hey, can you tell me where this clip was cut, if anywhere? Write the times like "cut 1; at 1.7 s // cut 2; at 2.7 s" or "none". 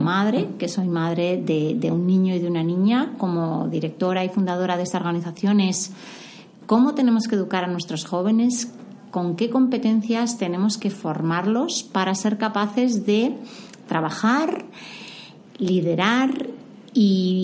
none